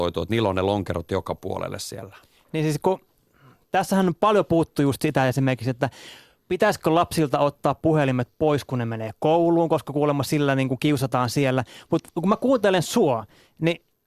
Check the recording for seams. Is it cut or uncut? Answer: uncut